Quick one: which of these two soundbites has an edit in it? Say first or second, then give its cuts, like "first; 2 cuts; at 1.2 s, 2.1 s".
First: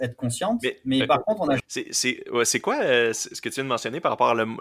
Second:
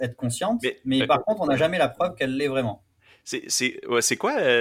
first; 1 cut; at 1.6 s